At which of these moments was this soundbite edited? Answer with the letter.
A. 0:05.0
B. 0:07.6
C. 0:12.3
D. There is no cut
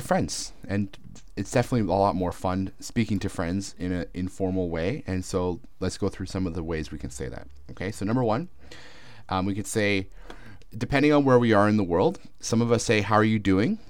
D